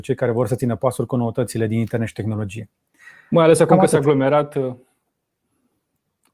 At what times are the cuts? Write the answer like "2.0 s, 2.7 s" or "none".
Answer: none